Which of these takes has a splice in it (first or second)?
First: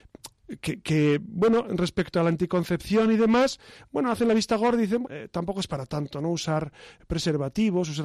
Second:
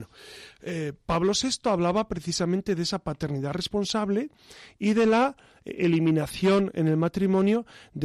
first